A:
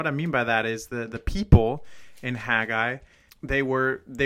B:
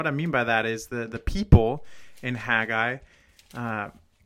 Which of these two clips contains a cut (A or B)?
A